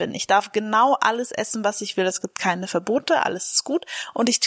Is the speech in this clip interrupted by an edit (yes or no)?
no